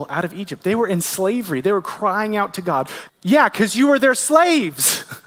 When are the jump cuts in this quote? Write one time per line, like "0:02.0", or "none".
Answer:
0:03.1